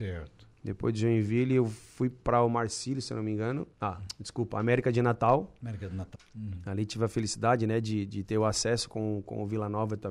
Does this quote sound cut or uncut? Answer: cut